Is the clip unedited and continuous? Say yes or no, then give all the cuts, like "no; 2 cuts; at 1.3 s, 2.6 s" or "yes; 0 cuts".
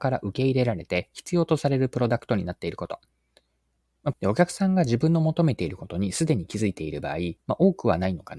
no; 2 cuts; at 4.1 s, 7.4 s